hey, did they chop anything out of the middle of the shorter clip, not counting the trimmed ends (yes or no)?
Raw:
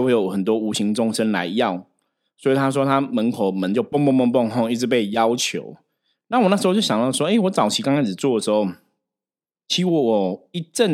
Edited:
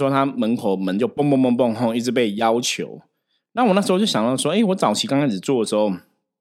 no